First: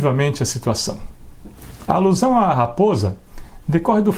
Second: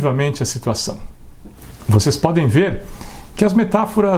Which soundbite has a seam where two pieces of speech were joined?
first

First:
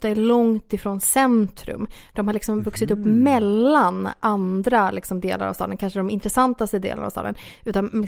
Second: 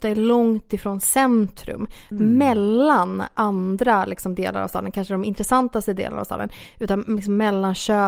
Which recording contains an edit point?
second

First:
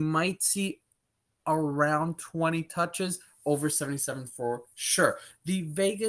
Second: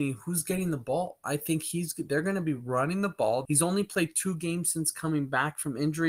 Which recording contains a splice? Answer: second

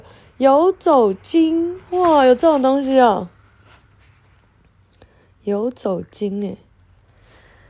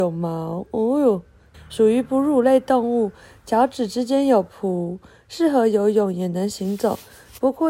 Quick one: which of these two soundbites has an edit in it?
second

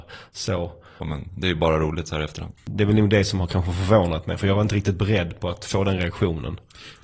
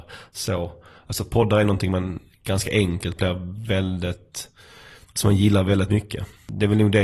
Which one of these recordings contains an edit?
first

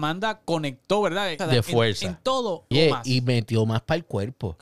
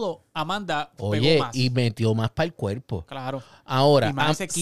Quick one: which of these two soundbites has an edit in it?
first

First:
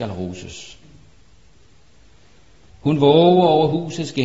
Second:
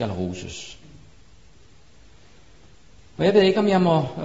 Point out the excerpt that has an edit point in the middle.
first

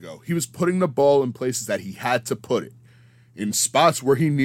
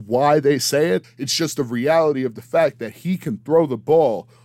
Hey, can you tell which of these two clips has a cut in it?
second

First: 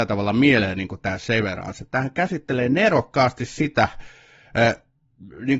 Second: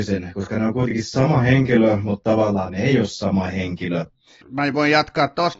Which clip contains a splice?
second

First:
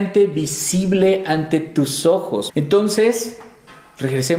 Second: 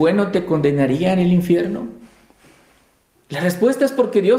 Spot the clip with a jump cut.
first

